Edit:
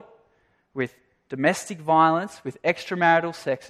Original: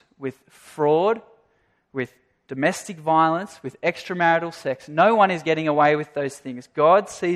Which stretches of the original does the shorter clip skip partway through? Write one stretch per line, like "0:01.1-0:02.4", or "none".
none